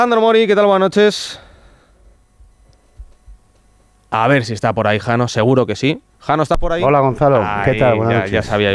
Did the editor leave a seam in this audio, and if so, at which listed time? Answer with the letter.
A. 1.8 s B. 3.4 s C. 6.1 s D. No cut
C